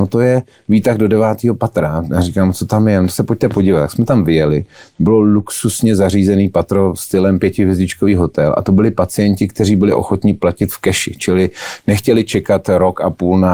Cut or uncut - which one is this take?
uncut